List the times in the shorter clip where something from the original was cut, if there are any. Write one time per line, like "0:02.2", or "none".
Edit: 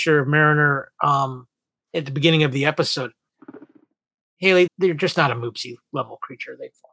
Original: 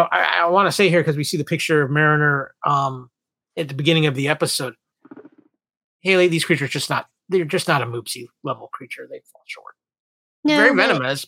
0:04.7

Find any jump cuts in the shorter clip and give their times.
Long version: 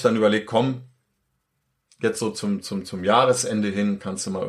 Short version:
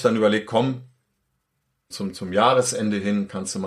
0:01.9

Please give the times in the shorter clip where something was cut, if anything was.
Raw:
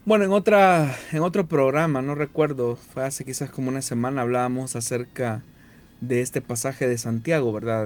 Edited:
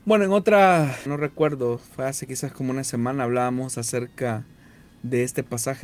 0:01.1

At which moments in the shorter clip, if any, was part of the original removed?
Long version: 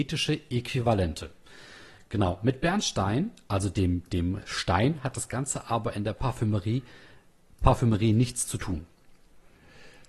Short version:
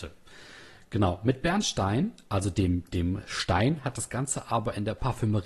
none

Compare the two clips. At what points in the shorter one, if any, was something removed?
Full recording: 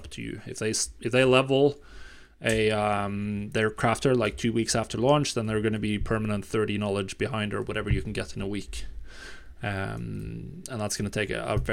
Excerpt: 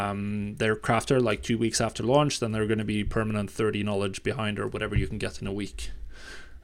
none

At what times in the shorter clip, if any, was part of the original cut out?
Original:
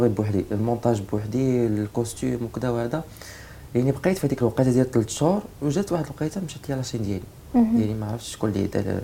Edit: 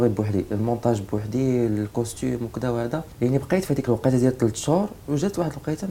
0:03.1

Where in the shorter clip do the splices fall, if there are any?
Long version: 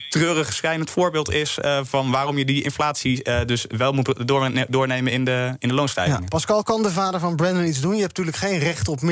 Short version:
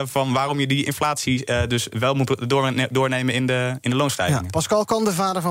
none

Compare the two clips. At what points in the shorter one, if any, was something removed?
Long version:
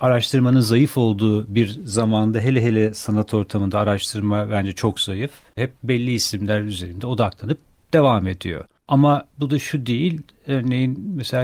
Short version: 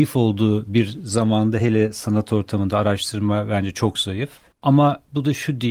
0:01.6
0:04.5

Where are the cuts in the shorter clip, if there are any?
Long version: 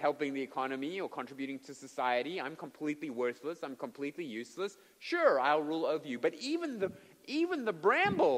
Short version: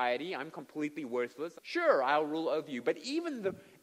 0:01.5

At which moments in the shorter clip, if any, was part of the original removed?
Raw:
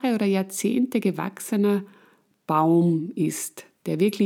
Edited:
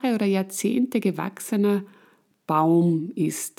none

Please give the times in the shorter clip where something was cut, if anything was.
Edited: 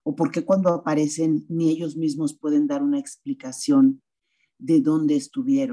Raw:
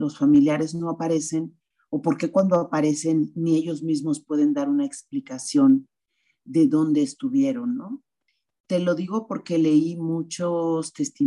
none

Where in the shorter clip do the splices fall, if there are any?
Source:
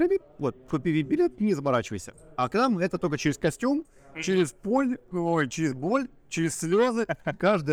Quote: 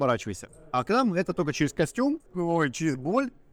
0:02.3

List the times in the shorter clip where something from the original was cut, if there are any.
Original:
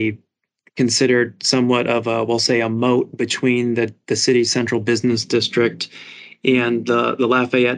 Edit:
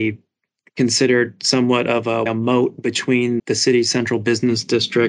0:02.3
0:03.4

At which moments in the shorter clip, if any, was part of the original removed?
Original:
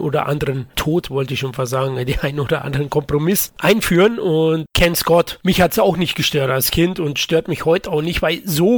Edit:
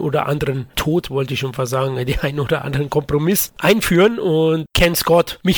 none

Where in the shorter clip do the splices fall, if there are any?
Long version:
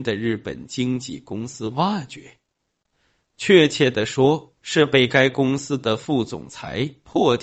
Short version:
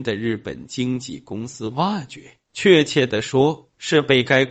0:02.4

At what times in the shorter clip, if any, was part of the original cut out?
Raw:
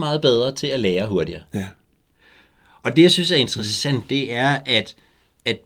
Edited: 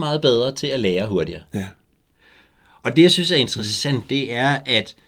none

